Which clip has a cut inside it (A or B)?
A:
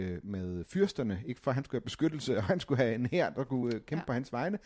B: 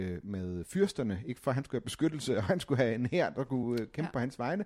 A